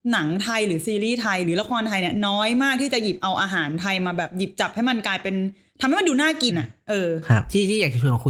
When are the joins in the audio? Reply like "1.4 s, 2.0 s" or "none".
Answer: 6.5 s